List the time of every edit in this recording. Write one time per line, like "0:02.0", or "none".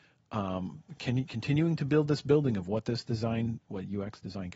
0:01.0
0:03.6